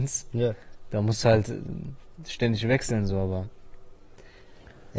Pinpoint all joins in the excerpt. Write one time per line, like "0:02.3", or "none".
none